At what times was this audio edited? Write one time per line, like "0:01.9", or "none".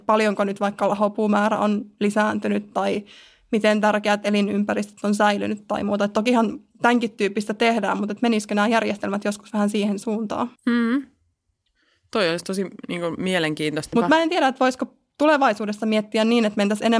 0:10.6
0:13.9